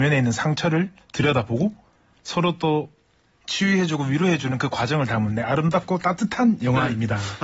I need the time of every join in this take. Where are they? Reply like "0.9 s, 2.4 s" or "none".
none

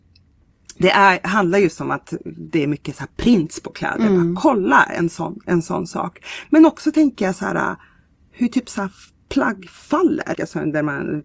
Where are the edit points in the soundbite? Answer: 10.3 s

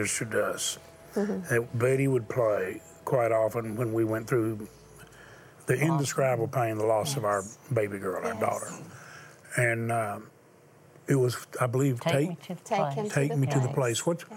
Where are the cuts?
none

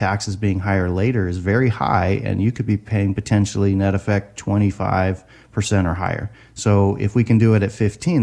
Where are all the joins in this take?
none

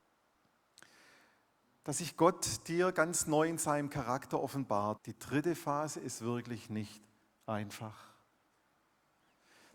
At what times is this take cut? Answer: 5.0 s

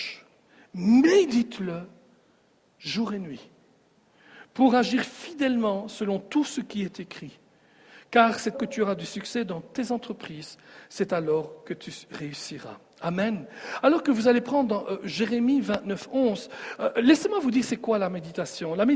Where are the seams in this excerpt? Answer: 8.5 s

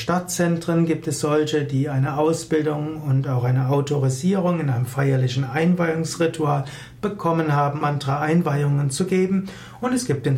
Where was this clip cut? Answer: 7.8 s

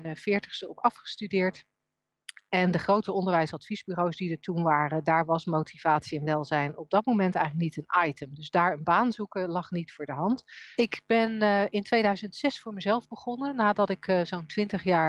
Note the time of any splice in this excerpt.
2.5 s, 10.7 s

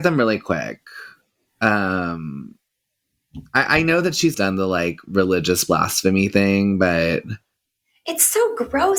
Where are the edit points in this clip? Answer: 4.3 s

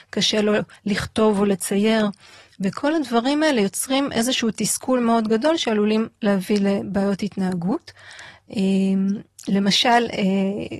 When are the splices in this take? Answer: none

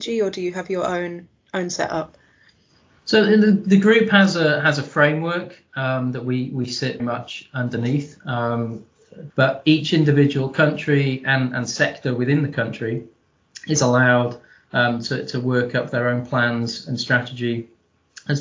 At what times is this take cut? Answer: 7.0 s, 9.3 s

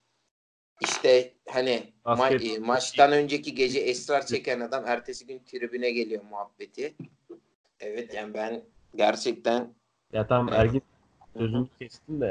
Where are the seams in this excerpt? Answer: 7.6 s

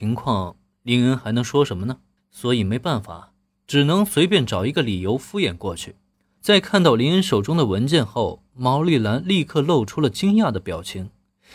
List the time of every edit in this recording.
2.2 s, 6.4 s

